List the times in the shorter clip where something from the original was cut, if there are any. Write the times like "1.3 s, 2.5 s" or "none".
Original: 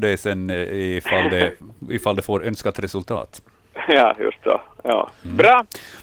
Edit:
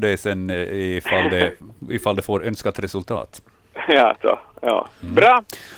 4.2 s